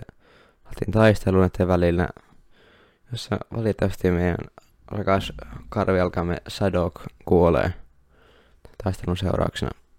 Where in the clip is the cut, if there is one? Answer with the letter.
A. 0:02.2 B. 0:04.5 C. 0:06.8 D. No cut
D